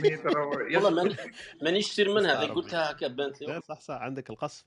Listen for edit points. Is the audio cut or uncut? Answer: cut